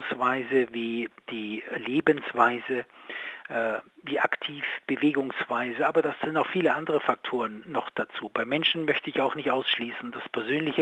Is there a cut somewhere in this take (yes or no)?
no